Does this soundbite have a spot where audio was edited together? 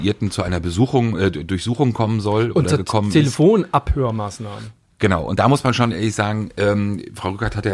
no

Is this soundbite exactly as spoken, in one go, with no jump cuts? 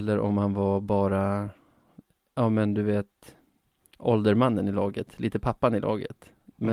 yes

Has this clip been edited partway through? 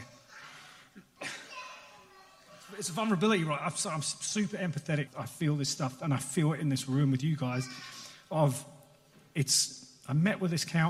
yes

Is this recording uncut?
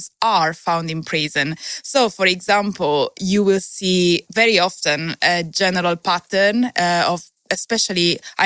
yes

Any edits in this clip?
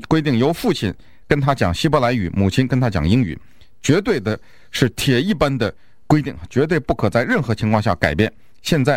no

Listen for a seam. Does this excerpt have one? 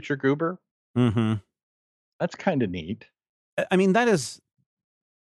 no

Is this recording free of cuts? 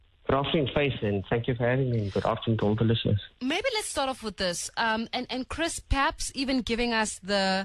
yes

